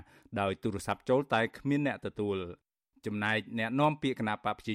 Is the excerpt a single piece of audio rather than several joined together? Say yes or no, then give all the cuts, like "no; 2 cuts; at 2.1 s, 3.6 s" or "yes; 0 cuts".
yes; 0 cuts